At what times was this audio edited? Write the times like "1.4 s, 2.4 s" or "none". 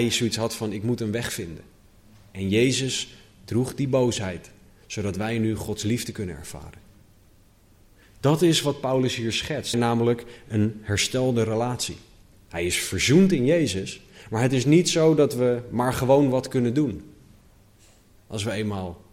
9.7 s, 12.4 s